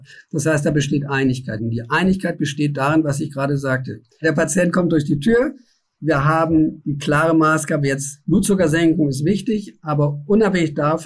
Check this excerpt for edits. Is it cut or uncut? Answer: uncut